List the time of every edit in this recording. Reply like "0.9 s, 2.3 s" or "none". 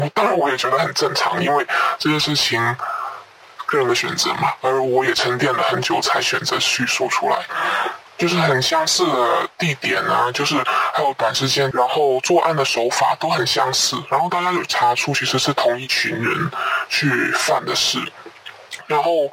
8.1 s, 11.7 s